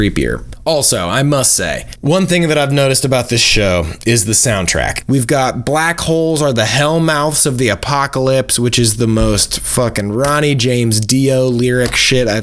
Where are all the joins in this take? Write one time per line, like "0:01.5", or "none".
0:05.0